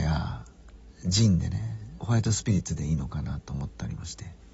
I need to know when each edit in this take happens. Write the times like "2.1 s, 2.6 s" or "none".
2.0 s

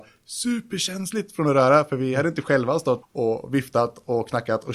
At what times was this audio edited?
3.0 s

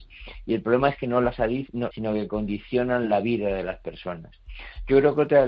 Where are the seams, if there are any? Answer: 1.9 s

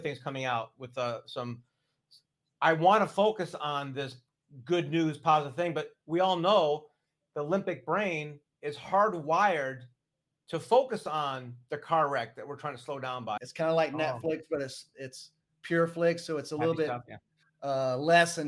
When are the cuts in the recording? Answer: 13.4 s

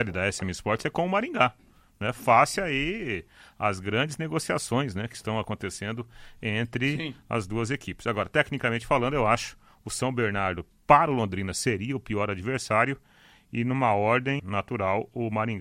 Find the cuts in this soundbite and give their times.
14.4 s

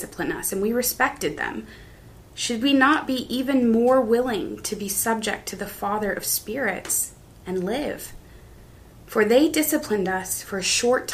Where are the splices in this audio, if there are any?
none

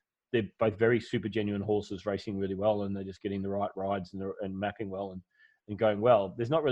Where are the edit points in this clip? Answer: none

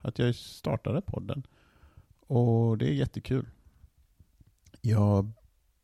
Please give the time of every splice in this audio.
none

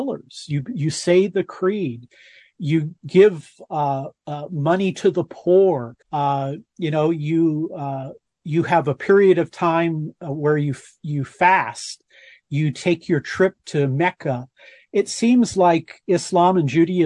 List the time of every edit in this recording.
4.2 s, 6.0 s

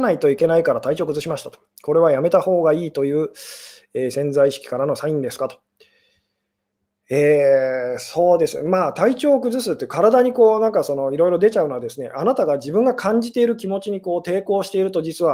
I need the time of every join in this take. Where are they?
none

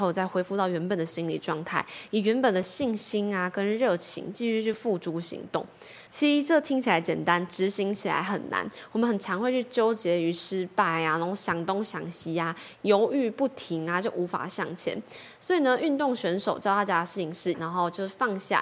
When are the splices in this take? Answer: 6.1 s, 17.5 s

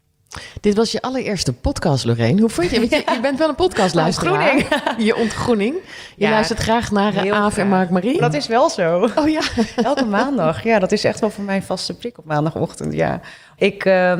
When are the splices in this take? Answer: none

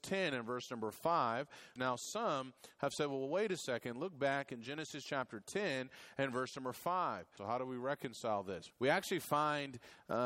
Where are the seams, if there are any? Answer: 1.8 s, 7.4 s, 8.7 s

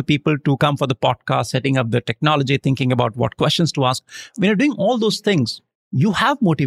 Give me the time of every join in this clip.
none

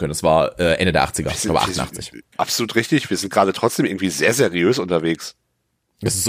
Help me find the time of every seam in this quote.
2.3 s

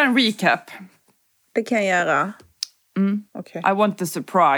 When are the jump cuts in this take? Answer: 3.3 s

